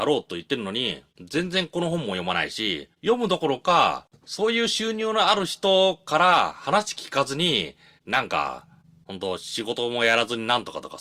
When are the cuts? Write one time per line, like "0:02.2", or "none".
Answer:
none